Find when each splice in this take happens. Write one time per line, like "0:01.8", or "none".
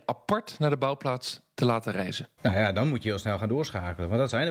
0:02.4